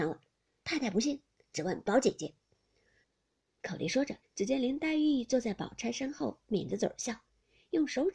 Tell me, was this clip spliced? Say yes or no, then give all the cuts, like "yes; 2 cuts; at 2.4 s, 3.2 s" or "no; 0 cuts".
yes; 2 cuts; at 3.0 s, 4.2 s